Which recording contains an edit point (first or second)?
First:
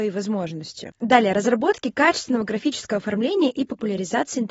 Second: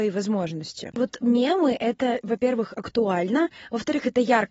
second